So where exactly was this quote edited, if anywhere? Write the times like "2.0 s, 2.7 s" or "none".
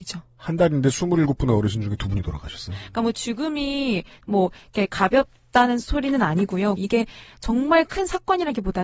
2.7 s, 6.8 s